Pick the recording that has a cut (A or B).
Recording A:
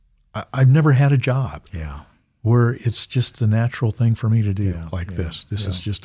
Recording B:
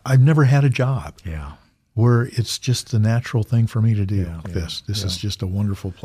B